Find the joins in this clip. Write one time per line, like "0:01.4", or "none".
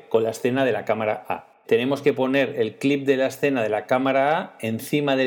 0:01.6

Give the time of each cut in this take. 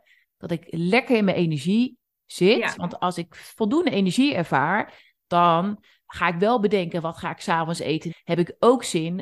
0:08.1

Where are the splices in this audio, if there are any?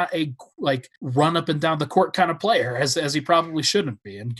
0:01.0

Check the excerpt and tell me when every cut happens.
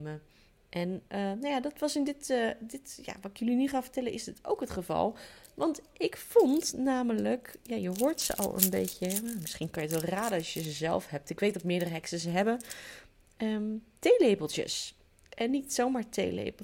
none

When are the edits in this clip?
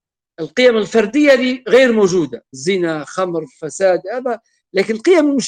0:02.5

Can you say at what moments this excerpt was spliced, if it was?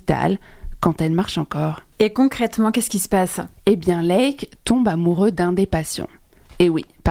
0:01.9
0:03.6

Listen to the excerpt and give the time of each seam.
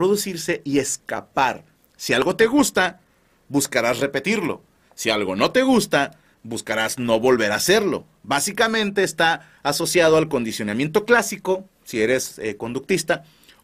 0:01.7

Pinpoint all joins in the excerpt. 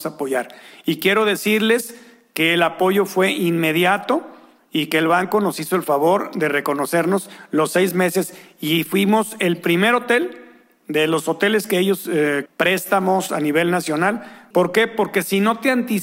0:12.5
0:14.5

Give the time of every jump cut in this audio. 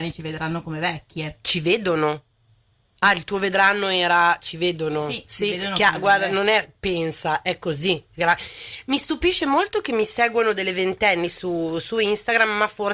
none

